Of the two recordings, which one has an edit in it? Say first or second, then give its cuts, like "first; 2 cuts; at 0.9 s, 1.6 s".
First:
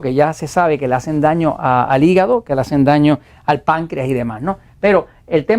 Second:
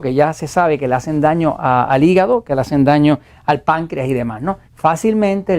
second; 1 cut; at 4.6 s